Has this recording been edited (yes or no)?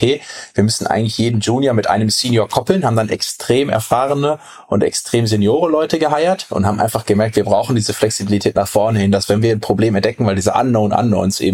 no